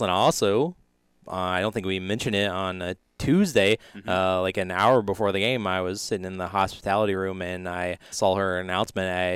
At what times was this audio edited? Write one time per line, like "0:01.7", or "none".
0:08.1